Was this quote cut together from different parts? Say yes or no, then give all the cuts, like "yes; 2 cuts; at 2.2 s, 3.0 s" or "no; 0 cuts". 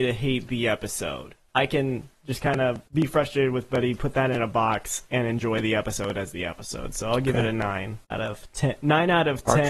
no; 0 cuts